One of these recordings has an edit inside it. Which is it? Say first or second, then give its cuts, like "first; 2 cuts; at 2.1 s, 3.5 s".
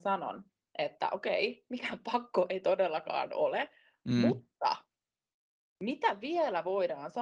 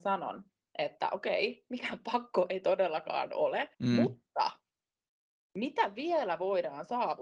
second; 1 cut; at 3.7 s